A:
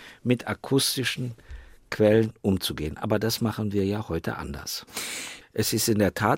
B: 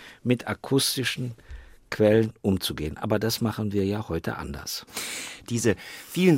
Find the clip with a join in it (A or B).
A